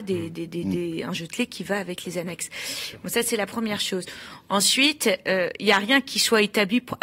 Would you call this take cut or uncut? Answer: uncut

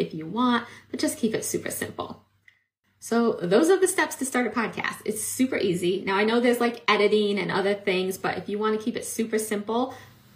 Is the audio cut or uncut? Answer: uncut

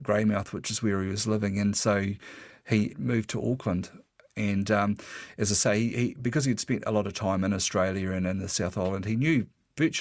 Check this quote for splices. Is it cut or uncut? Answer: cut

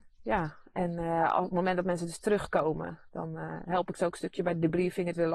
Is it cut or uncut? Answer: uncut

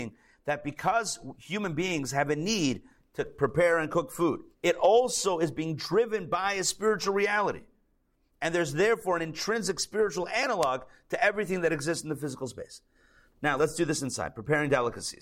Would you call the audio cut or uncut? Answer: cut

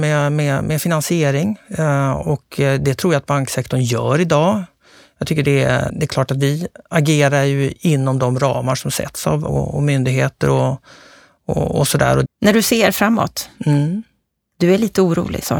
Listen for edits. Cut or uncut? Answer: cut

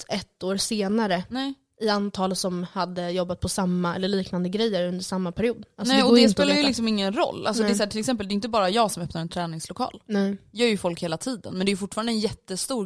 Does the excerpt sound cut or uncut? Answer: uncut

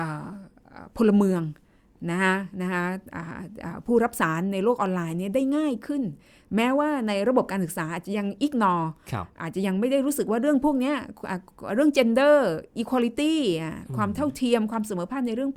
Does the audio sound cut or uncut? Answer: uncut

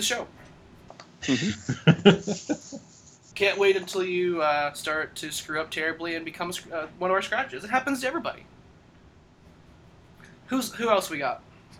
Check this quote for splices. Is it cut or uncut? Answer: uncut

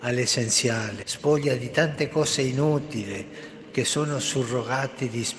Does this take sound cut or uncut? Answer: cut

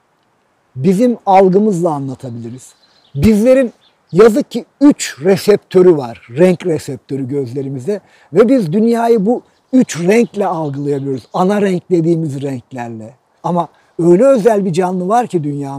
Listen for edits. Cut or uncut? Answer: cut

